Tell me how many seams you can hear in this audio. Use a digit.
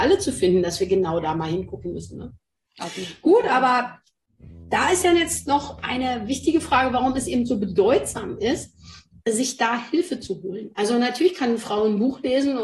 0